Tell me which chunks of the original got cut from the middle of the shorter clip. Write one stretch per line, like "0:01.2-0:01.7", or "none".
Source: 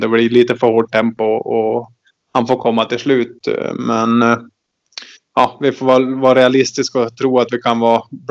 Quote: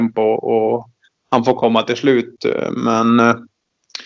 none